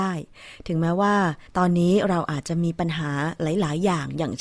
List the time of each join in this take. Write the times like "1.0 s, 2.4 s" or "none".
1.5 s